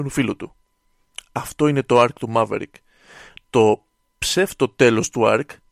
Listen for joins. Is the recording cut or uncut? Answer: uncut